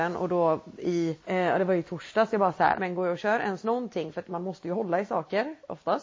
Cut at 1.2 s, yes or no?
yes